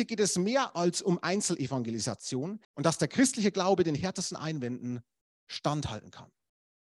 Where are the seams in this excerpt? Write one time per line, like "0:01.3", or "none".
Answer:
0:02.6